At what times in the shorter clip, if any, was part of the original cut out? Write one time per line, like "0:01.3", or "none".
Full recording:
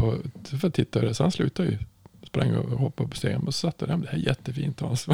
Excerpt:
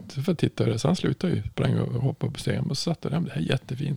0:01.5